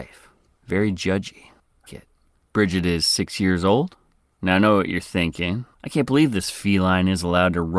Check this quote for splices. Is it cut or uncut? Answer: cut